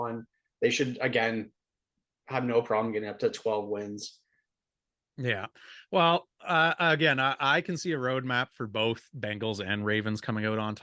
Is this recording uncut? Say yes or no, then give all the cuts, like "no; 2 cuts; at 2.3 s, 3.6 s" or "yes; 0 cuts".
yes; 0 cuts